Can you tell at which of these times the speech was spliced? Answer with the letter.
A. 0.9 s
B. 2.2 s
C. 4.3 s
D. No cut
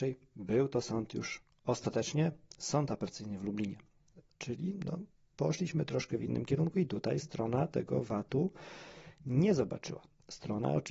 C